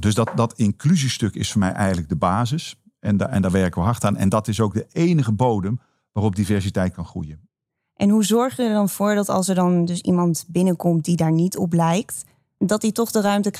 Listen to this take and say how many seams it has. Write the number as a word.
zero